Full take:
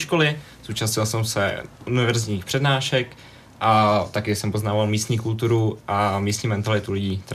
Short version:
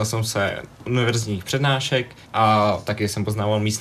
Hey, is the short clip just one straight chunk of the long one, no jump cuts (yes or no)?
no